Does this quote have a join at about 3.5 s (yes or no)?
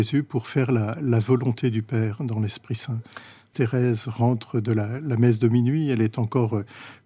yes